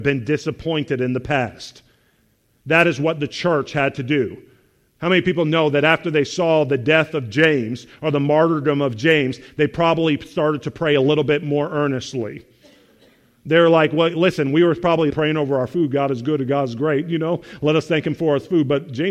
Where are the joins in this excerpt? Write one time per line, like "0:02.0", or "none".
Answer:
0:15.1